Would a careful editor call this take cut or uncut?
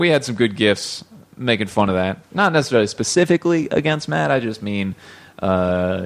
cut